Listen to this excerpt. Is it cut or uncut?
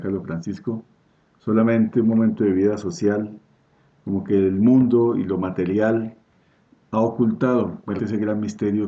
cut